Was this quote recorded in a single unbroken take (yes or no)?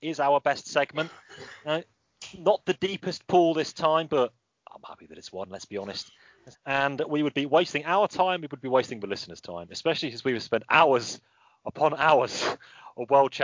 no